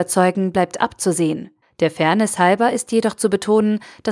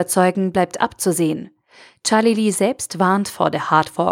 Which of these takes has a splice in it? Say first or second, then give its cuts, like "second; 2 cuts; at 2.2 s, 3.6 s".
first; 1 cut; at 1.6 s